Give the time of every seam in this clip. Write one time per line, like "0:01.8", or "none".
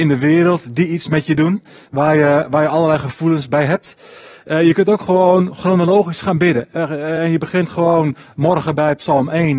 none